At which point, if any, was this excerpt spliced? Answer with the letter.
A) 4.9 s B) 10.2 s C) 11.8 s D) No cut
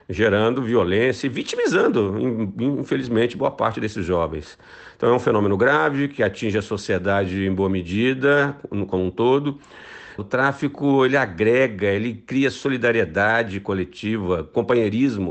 B